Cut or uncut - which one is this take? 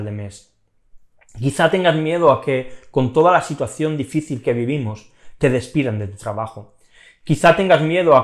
uncut